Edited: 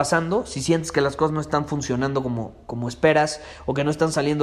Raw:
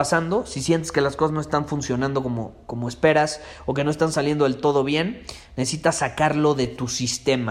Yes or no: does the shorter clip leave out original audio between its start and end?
no